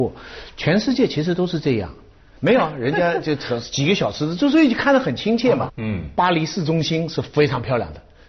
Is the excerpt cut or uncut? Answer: cut